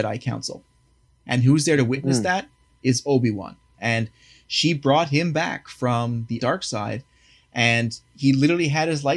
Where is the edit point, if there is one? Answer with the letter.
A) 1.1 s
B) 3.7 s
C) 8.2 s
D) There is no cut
B